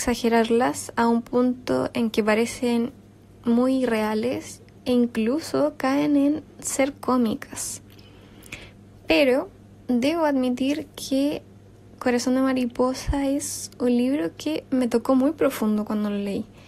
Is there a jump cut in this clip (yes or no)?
no